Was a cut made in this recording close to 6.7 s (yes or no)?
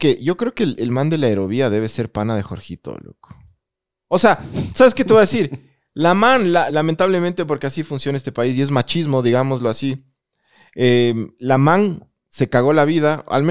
yes